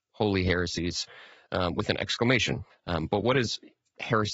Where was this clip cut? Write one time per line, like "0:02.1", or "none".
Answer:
0:02.7